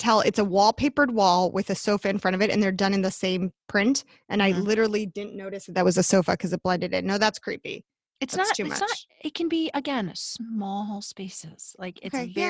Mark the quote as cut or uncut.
uncut